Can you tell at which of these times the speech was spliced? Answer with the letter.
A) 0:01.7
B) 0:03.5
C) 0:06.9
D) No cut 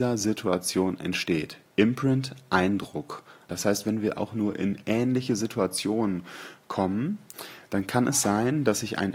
B